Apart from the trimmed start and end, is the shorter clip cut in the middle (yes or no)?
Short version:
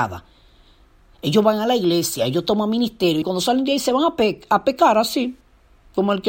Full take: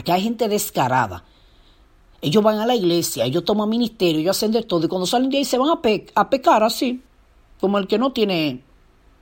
yes